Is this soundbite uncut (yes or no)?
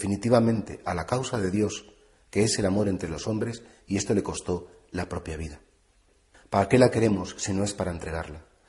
yes